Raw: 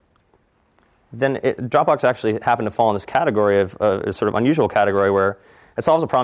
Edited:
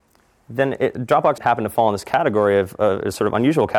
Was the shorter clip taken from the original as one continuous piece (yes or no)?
no